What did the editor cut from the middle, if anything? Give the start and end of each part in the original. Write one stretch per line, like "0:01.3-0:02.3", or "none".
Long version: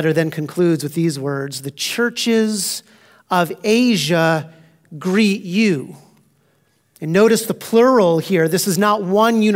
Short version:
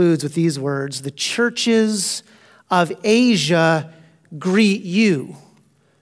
none

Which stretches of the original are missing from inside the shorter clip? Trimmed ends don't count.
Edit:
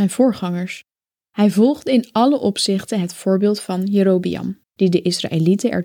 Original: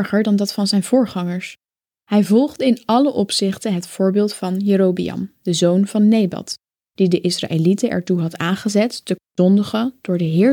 0:05.4-0:06.8

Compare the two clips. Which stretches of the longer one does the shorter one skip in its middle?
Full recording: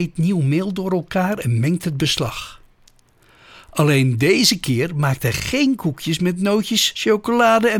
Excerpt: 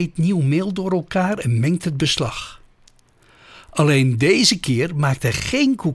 none

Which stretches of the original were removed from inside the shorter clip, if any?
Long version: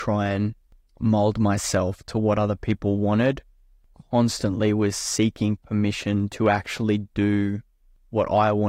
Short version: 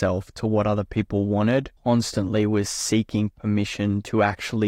0:03.5-0:04.0

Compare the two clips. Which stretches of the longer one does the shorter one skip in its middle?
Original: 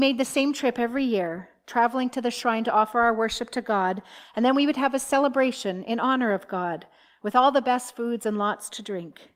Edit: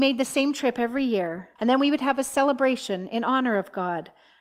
0:01.6-0:04.3

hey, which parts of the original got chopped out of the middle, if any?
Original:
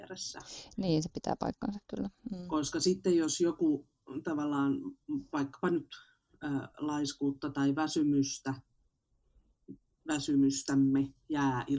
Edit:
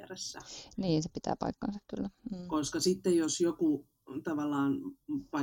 none

